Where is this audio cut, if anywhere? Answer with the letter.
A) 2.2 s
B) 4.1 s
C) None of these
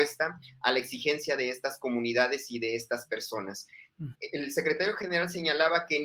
B